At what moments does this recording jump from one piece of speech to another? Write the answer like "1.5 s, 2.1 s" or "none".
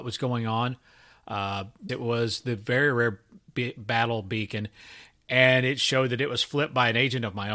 1.9 s